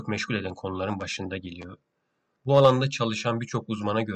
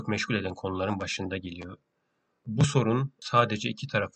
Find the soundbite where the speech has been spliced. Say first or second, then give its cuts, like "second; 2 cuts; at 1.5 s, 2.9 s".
first; 1 cut; at 2.3 s